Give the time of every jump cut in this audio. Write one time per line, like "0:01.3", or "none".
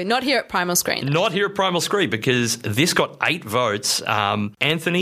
none